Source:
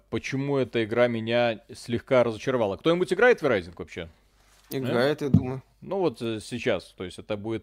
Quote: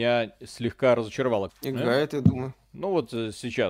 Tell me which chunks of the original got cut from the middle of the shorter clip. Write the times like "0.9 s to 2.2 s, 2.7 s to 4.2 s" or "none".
2.8 s to 4.6 s